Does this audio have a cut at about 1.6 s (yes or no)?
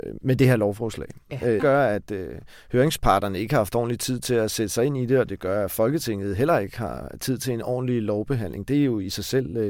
yes